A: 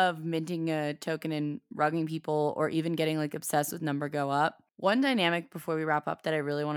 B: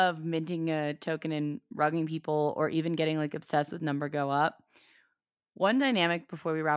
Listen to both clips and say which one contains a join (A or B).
A